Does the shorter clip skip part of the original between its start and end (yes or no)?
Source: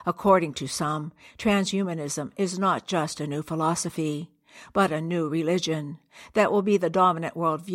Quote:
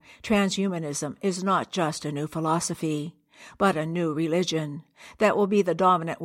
no